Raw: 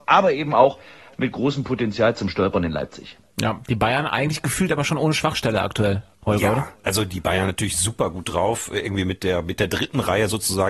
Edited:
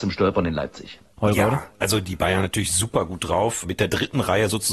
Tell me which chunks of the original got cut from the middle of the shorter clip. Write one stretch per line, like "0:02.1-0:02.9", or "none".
0:03.3-0:06.2
0:08.7-0:09.4